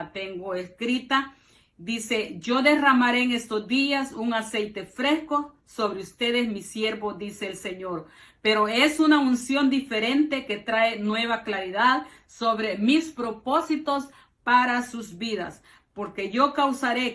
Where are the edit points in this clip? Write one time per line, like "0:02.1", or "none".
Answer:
none